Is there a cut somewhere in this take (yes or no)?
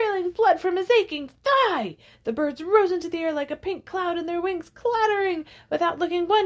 no